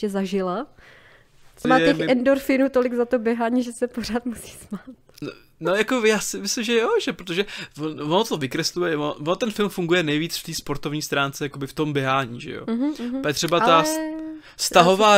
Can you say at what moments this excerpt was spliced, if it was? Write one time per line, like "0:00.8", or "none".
0:01.6